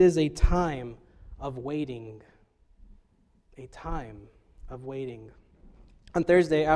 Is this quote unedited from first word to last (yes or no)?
yes